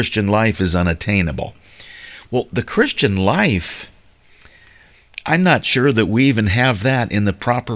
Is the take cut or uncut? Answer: uncut